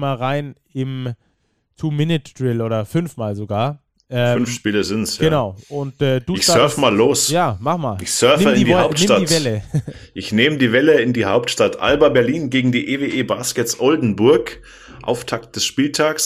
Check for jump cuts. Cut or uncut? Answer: uncut